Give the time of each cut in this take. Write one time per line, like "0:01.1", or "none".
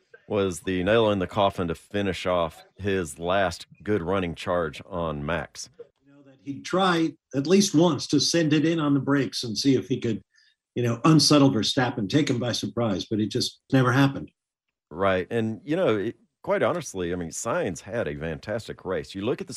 0:13.7

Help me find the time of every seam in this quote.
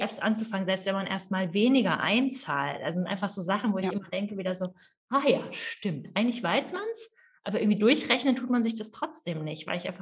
none

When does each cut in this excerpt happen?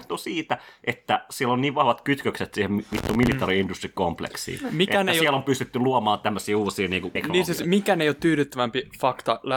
0:07.2

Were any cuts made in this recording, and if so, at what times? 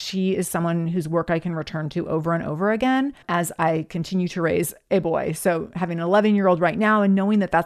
0:03.2

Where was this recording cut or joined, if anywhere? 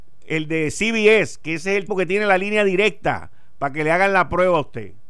0:01.9

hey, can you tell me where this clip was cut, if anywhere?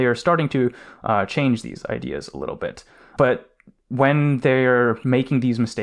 0:03.2

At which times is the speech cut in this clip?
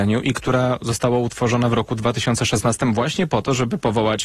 none

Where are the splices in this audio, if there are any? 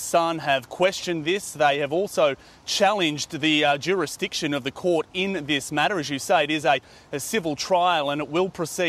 none

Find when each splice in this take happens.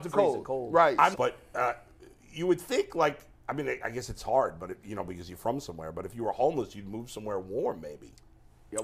0:01.1

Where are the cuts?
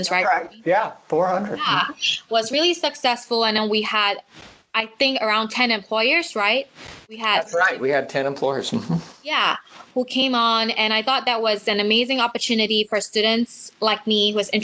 0:07.0

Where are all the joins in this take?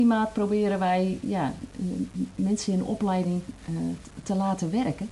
none

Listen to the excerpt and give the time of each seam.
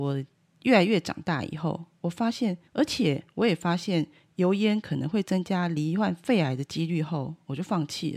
0:02.7

